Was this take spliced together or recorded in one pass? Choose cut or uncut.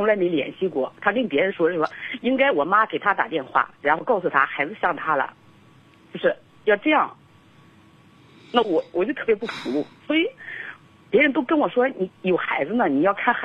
cut